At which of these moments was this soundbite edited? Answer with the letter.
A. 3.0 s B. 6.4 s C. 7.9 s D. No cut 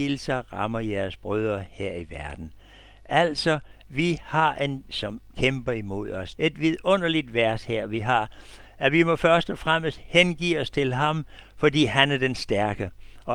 B